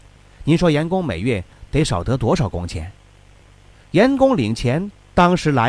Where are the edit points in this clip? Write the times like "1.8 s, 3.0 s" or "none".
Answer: 3.7 s